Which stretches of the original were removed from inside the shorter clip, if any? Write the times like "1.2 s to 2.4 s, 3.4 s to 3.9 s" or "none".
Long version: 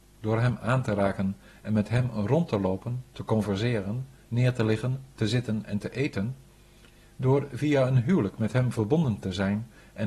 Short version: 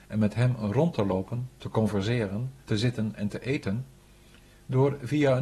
4.2 s to 5.1 s